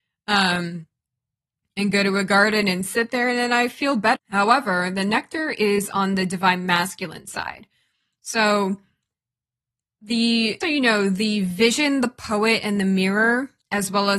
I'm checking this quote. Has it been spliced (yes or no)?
yes